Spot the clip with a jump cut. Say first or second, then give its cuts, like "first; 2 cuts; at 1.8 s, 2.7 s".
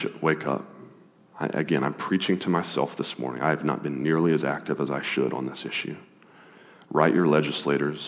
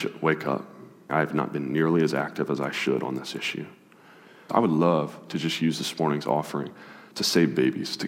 second; 2 cuts; at 1.1 s, 4.5 s